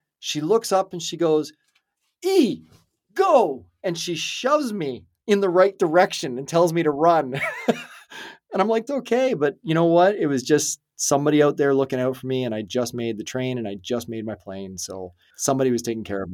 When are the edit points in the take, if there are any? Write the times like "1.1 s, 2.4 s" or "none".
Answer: 8.9 s